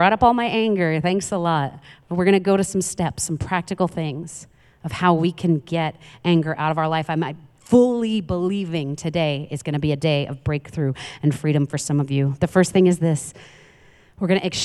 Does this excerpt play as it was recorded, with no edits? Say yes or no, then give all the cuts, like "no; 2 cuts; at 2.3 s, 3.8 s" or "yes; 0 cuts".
yes; 0 cuts